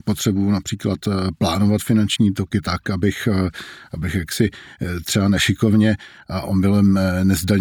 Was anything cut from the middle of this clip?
no; 0 cuts

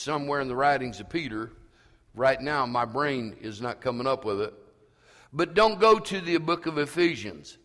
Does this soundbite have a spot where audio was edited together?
no; 0 cuts

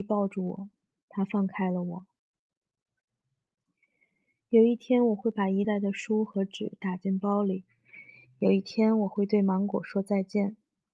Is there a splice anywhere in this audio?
yes; 1 cut; at 5.6 s

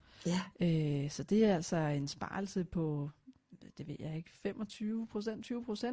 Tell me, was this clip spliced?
no; 0 cuts

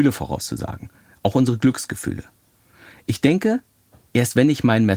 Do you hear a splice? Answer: no; 0 cuts

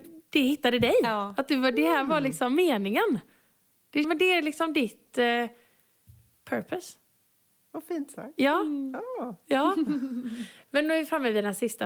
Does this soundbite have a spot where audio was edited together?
yes; 1 cut; at 4.0 s

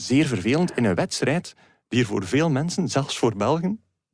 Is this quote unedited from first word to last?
yes; 0 cuts

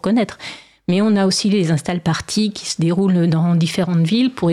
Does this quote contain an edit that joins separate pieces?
no; 0 cuts

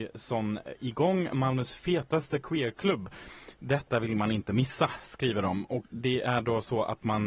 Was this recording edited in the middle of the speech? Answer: yes; 1 cut; at 5.9 s

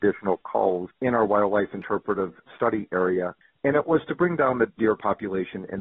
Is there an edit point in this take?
no; 0 cuts

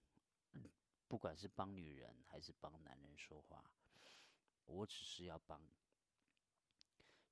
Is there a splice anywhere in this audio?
yes; 1 cut; at 4.7 s

